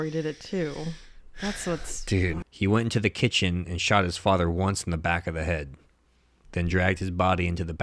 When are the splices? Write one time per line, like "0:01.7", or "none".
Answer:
0:02.4